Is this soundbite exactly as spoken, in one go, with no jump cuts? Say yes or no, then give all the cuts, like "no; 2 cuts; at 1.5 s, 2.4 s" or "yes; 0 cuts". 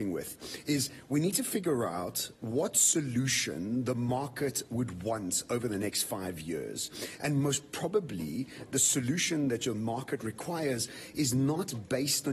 yes; 0 cuts